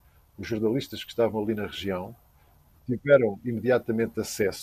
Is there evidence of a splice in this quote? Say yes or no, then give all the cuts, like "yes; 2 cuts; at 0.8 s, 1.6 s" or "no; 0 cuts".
no; 0 cuts